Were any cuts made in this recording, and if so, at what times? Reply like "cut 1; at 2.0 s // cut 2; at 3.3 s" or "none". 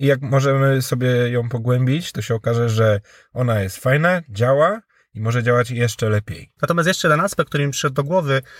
cut 1; at 6.6 s